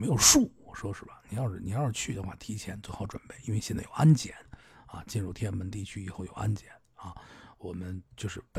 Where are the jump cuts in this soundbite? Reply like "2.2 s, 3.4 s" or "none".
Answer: none